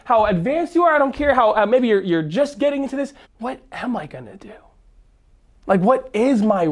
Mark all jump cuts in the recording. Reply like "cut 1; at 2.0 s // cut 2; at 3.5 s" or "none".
cut 1; at 3.2 s